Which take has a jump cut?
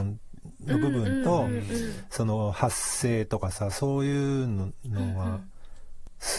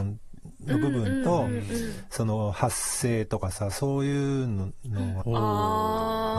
second; 1 cut; at 5.2 s

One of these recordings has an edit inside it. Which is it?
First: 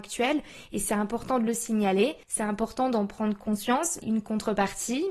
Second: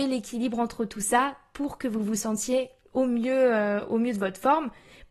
first; 2 cuts; at 2.2 s, 4.0 s

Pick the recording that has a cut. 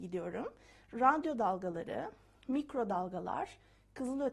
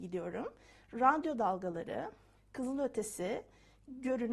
second; 1 cut; at 2.4 s

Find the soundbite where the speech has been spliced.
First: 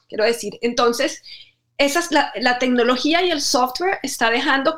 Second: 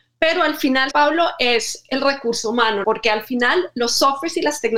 second; 2 cuts; at 0.9 s, 2.8 s

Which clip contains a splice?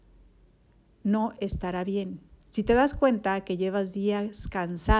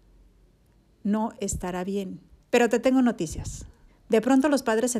second; 2 cuts; at 2.4 s, 3.9 s

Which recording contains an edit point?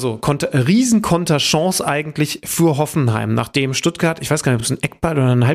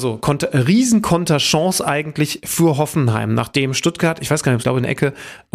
second; 1 cut; at 4.6 s

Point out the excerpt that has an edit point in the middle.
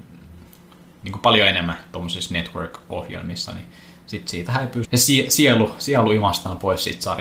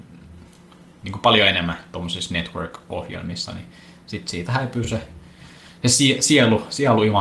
first; 1 cut; at 4.8 s

